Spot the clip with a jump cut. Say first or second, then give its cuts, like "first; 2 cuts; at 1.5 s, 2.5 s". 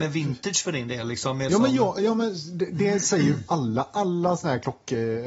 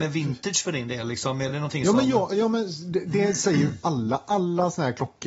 first; 1 cut; at 1.5 s